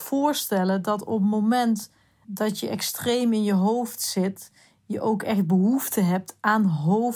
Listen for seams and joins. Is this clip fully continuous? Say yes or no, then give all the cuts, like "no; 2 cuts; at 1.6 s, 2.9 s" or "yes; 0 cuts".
no; 1 cut; at 2.2 s